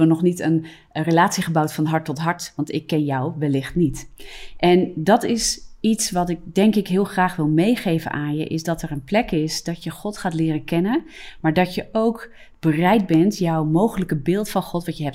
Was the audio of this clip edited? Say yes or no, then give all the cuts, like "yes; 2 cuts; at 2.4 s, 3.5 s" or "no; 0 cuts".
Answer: no; 0 cuts